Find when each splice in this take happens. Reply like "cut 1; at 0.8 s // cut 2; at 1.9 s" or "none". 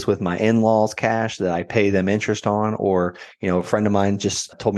none